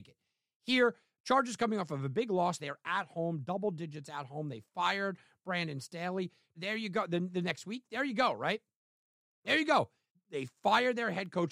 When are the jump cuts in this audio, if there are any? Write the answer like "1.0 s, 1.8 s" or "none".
2.6 s, 6.5 s, 10.1 s